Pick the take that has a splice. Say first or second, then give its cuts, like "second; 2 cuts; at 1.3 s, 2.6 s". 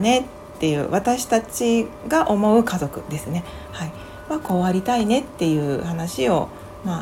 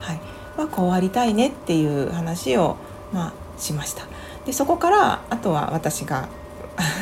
second; 1 cut; at 5.3 s